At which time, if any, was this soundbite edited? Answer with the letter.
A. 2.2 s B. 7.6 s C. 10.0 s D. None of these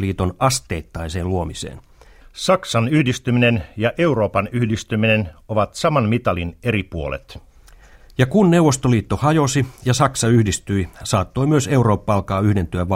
A